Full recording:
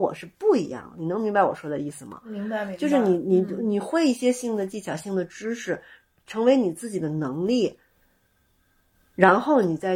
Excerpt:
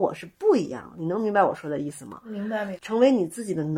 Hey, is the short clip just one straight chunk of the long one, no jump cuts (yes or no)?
no